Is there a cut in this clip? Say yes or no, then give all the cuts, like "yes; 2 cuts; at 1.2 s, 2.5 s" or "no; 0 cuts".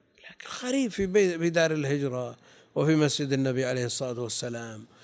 no; 0 cuts